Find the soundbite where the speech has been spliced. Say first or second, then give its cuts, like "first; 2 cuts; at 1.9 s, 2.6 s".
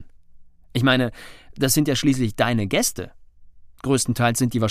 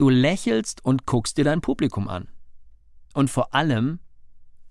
second; 1 cut; at 3.1 s